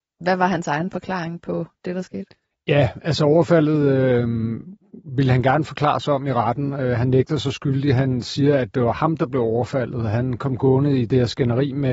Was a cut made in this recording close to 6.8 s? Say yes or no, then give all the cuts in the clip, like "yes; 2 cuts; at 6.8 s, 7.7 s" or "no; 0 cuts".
no; 1 cut; at 2.5 s